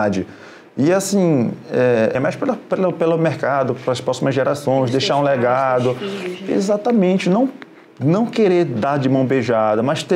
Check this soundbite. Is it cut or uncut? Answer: cut